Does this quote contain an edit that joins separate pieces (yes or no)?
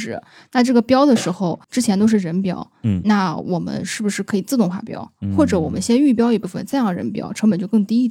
yes